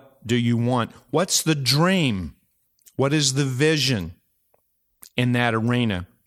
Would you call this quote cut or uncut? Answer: uncut